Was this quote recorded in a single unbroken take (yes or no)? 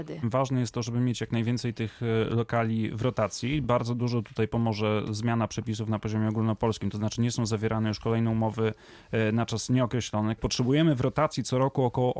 yes